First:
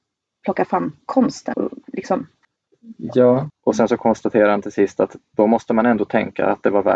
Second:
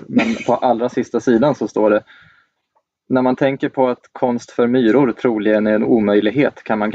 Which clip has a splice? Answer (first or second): first